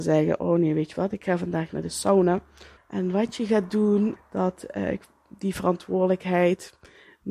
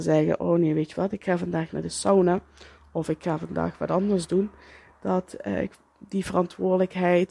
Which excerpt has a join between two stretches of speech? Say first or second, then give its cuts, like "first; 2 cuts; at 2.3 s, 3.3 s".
first; 2 cuts; at 2.8 s, 4.2 s